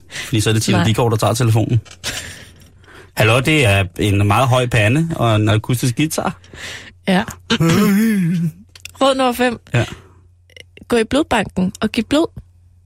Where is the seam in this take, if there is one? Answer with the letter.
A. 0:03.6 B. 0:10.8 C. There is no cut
C